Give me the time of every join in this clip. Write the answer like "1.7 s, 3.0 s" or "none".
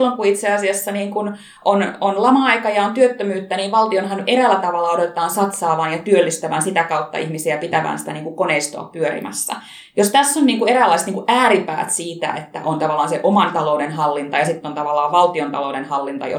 none